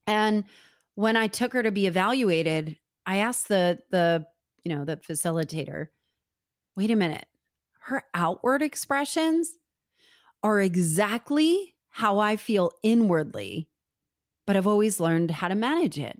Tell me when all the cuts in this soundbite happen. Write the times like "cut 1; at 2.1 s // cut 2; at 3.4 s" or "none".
none